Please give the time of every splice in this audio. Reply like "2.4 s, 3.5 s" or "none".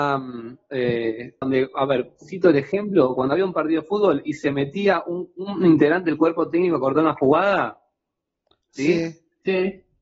1.4 s

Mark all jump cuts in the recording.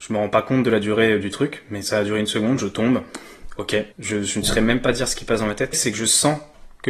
3.9 s, 5.7 s

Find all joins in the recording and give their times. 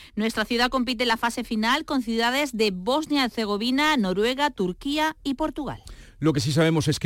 none

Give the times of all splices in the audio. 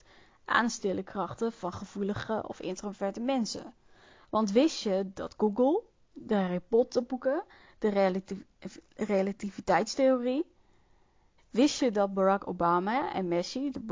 11.4 s

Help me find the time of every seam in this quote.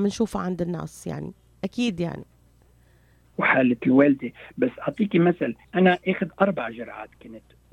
3.3 s, 5.6 s

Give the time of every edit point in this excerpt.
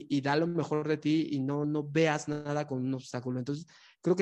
1.6 s

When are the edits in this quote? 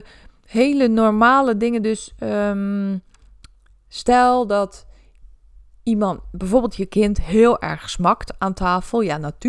none

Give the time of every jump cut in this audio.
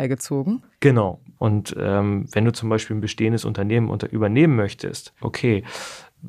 1.4 s, 5.2 s

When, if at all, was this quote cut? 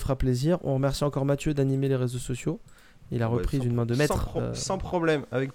none

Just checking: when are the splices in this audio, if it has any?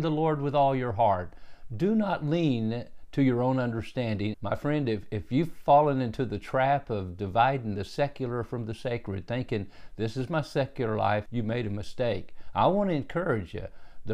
4.3 s, 11.3 s

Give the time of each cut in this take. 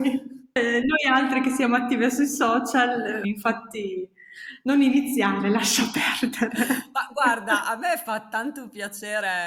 3.2 s

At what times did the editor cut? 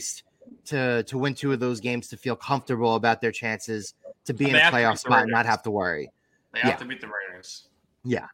none

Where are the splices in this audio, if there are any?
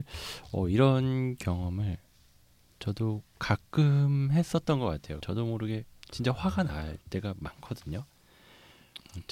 5.2 s

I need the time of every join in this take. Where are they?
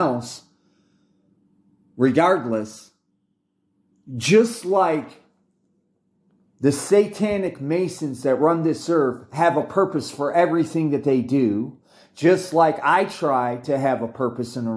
none

